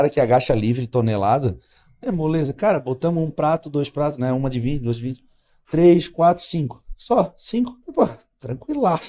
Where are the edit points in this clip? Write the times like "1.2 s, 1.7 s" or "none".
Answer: 7.8 s